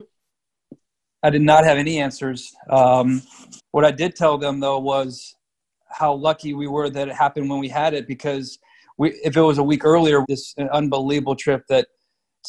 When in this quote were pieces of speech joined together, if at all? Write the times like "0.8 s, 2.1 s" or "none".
3.6 s, 10.2 s